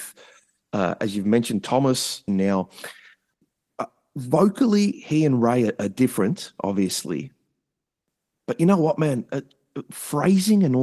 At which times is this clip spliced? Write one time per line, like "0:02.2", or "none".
0:02.3

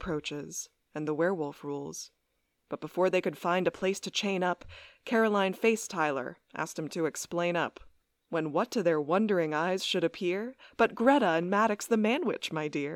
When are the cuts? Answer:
none

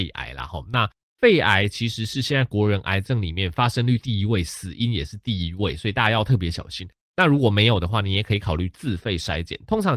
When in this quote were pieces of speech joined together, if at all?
0:07.1

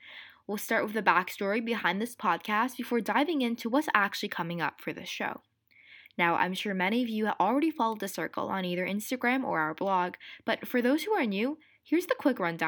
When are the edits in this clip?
0:06.0

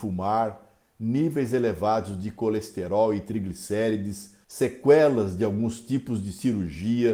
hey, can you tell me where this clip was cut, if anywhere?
0:04.4

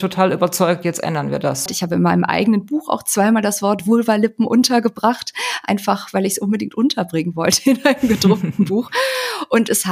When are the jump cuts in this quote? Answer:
0:01.7

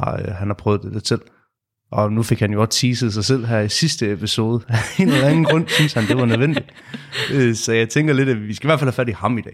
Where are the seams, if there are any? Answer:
none

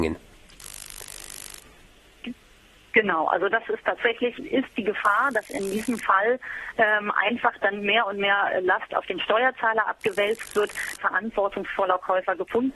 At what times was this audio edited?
0:04.4
0:11.0

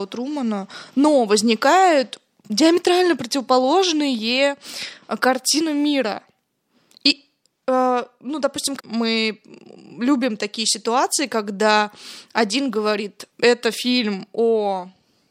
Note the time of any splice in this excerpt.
0:08.8
0:13.3

